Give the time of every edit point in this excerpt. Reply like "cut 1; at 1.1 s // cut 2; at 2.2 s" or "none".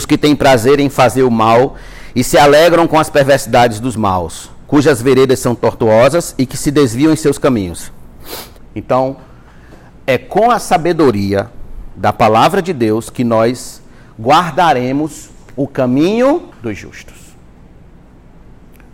cut 1; at 8.6 s // cut 2; at 16.5 s

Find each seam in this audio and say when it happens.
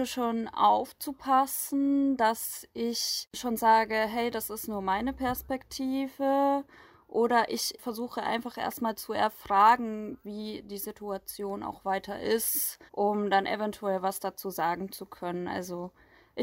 cut 1; at 12.9 s

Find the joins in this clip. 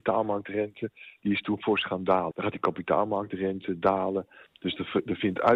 cut 1; at 2.3 s // cut 2; at 4.5 s

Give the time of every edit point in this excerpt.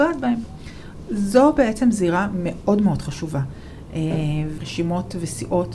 cut 1; at 4.6 s

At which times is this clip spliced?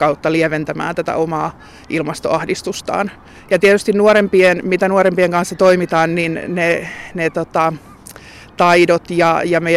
none

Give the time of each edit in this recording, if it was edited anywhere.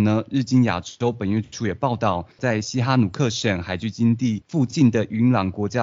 cut 1; at 2.4 s

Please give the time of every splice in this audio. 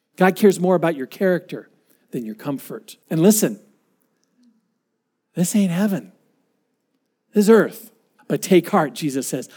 cut 1; at 3.0 s // cut 2; at 8.2 s

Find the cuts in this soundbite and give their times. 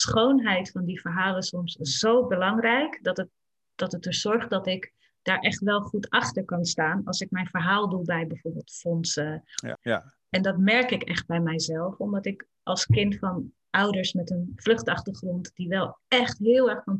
cut 1; at 9.7 s

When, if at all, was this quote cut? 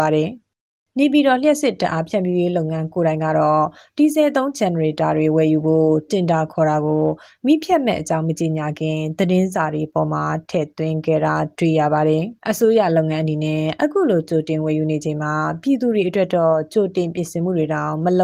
cut 1; at 12.4 s

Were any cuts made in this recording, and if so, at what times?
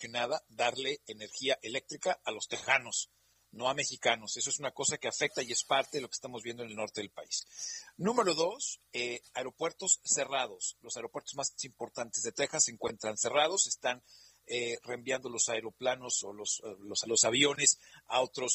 cut 1; at 17.0 s

